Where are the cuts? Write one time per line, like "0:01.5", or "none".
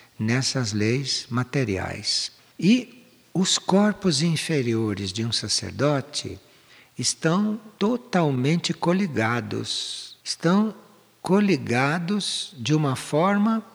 0:02.4
0:10.2